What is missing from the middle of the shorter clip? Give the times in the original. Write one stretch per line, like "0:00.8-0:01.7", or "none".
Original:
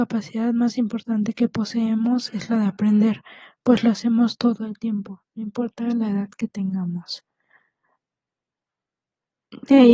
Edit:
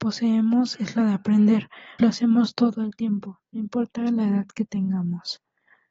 0:03.5-0:03.8